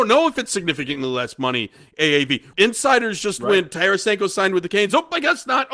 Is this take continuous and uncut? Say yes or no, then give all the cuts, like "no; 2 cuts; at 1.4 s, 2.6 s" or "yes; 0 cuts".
no; 1 cut; at 2.5 s